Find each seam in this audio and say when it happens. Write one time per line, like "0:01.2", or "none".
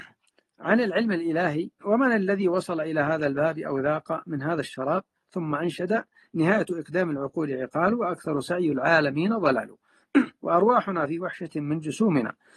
0:01.8